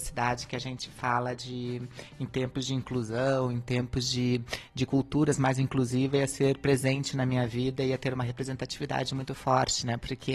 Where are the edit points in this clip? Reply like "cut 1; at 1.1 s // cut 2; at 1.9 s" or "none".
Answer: none